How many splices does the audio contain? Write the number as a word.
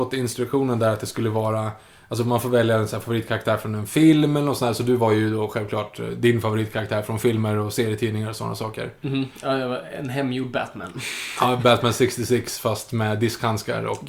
zero